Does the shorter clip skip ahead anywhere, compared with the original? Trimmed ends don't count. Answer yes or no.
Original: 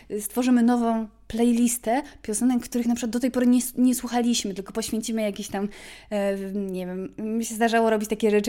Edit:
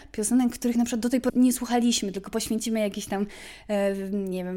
yes